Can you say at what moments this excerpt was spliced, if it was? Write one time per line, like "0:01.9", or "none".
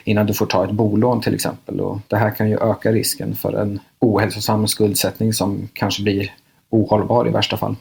none